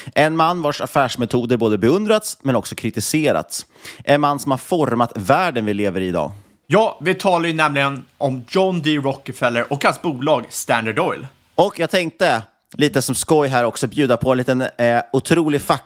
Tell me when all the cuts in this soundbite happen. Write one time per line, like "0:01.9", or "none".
none